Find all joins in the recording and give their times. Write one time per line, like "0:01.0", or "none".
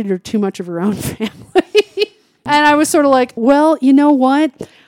0:03.4